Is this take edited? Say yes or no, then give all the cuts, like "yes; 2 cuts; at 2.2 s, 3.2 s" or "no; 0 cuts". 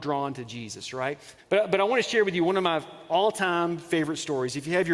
yes; 1 cut; at 1.4 s